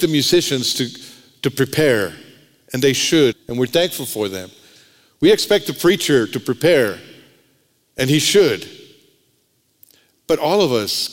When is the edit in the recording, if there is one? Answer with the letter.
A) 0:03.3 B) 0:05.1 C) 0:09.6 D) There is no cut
A